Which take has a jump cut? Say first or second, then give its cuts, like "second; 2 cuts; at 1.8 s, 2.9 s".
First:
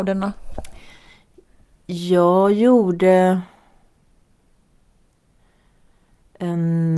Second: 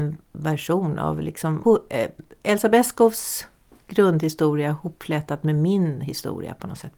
second; 1 cut; at 1.6 s